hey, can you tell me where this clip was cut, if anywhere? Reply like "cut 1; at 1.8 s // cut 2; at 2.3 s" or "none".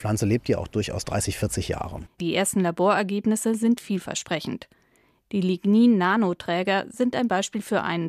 none